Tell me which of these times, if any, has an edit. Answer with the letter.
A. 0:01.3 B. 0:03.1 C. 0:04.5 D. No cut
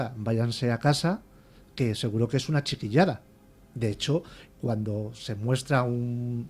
C